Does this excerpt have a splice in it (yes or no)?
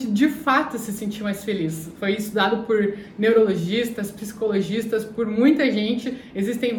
no